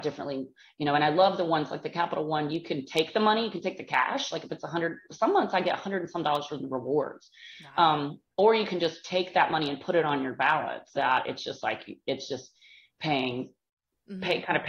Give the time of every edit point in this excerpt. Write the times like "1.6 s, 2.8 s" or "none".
10.9 s